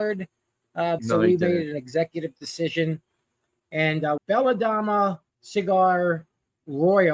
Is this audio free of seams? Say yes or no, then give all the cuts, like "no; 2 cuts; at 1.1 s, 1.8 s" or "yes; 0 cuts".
no; 3 cuts; at 1.0 s, 4.2 s, 5.3 s